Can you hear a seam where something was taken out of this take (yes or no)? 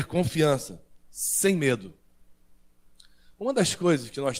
no